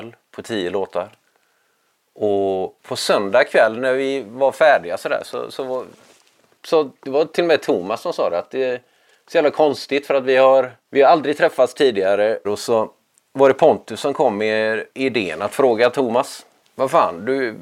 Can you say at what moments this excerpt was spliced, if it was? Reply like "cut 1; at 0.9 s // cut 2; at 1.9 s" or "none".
cut 1; at 12.4 s // cut 2; at 14.9 s